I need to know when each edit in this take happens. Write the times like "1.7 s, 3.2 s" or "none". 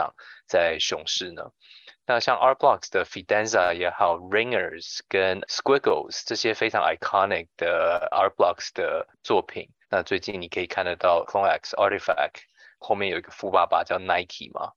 9.8 s